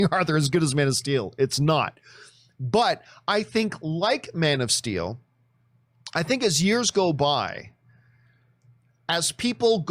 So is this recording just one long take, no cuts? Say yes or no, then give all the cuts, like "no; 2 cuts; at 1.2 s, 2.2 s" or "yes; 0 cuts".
yes; 0 cuts